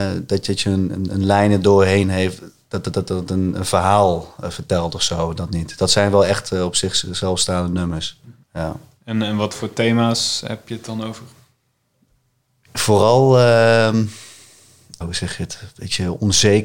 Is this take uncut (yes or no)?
no